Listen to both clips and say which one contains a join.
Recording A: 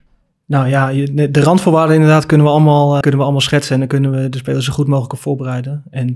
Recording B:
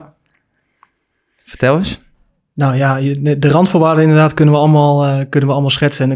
A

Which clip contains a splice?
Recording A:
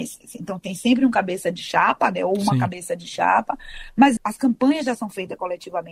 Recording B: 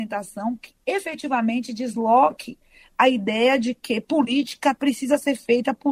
A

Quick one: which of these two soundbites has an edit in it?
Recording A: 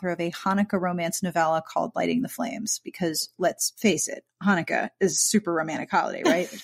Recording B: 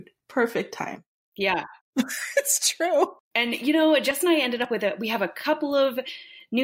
B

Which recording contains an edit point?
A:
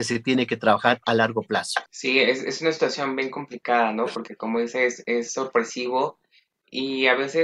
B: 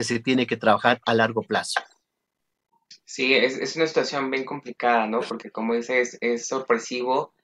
A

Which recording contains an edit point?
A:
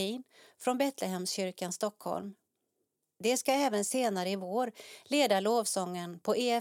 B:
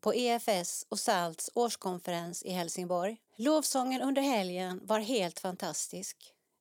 B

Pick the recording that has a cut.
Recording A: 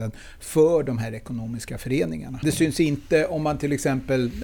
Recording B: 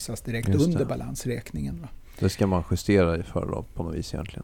A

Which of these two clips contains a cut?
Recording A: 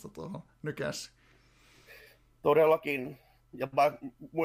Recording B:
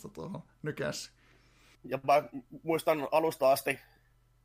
B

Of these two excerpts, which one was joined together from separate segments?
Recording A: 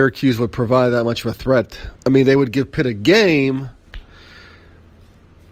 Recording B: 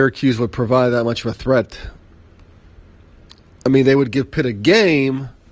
A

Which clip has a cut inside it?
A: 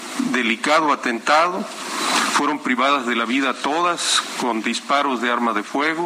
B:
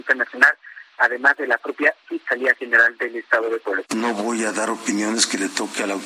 B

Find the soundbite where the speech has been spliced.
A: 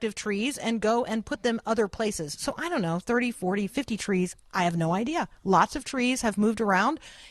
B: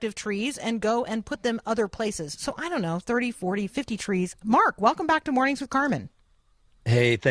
B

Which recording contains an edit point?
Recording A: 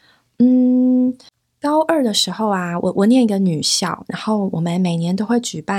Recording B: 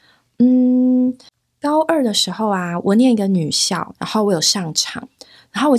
B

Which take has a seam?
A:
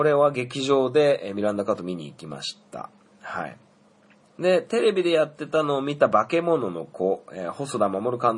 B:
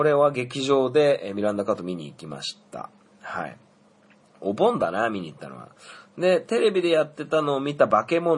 A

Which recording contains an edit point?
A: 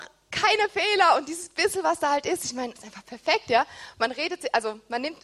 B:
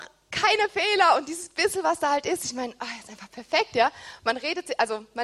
A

